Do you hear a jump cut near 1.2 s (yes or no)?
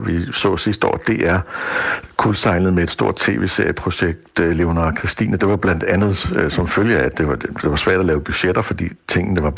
no